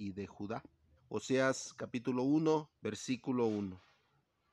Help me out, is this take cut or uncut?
cut